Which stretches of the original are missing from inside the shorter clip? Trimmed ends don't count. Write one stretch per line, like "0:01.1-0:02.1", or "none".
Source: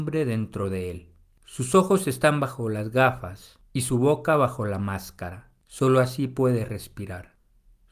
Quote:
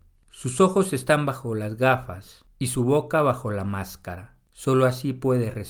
none

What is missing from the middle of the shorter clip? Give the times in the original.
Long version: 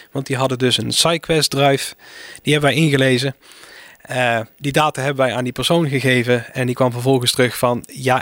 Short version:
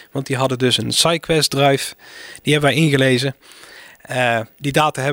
none

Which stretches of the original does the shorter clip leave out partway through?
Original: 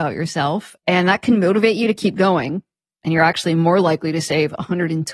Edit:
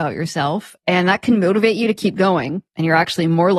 0:02.7-0:03.0

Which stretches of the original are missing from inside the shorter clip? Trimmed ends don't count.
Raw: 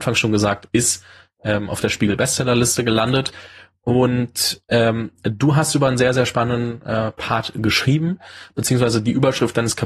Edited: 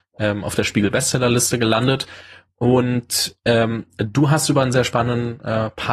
0:06.0-0:06.1

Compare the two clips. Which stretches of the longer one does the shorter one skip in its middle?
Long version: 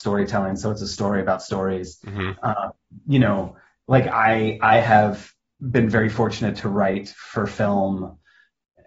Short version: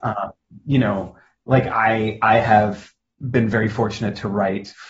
none

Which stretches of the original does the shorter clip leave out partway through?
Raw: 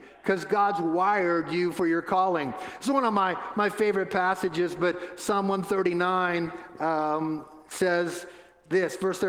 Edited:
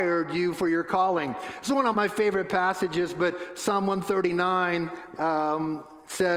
0:03.1-0:03.5

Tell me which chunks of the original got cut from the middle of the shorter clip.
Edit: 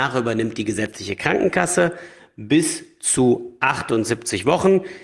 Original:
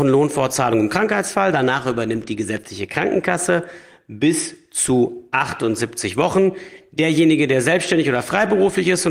none

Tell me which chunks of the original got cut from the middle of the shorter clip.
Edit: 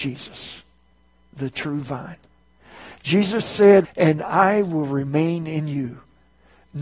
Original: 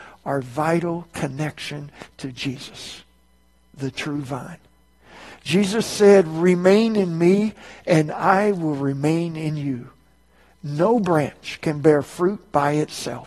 0:06.3-0:07.7

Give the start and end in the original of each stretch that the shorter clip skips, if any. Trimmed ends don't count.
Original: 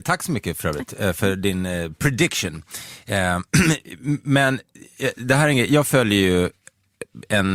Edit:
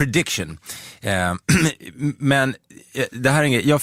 none

